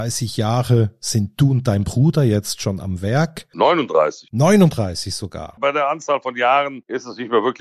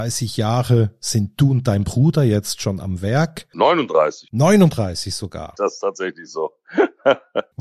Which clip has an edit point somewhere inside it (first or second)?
second